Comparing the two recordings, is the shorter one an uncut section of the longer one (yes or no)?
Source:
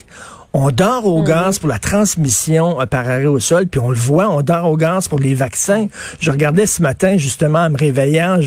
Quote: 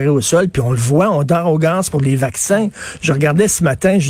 yes